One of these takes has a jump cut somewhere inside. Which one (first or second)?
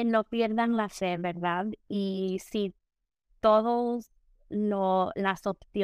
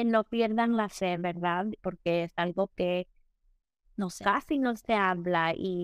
second